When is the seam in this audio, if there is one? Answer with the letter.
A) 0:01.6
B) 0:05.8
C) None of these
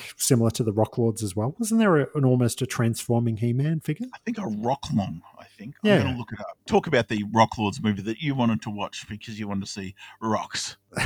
C